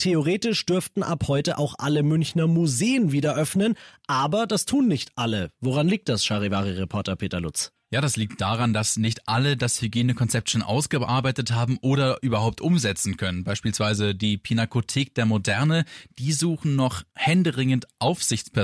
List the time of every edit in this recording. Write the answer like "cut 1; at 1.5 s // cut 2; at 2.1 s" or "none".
none